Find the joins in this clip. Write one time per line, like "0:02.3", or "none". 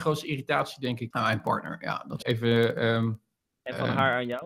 0:01.1
0:02.2